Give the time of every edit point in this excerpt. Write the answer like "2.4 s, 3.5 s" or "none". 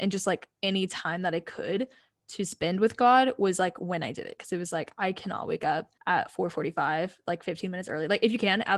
6.0 s